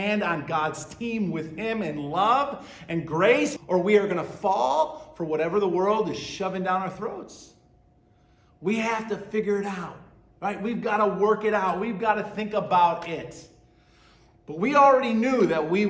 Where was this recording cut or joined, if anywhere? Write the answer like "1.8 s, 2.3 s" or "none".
3.6 s